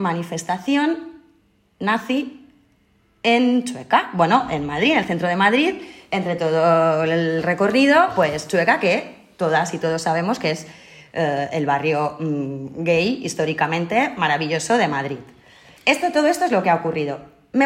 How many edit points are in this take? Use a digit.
1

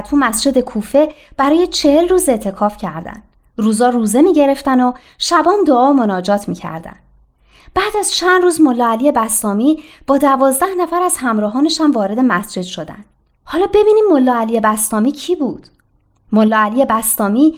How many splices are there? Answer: 0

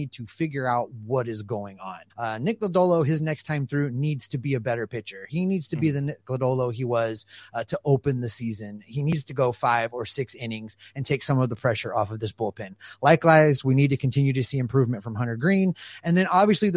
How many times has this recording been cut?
1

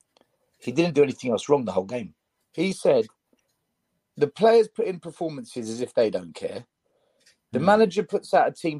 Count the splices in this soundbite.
1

